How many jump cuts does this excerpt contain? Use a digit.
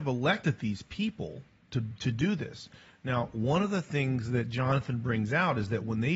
0